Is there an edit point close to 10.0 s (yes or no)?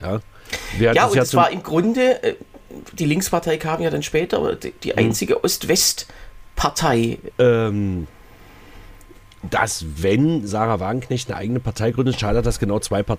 no